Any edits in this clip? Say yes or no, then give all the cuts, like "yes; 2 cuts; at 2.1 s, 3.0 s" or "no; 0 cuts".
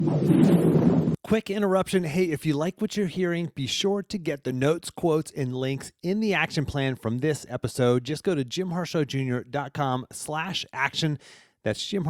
no; 0 cuts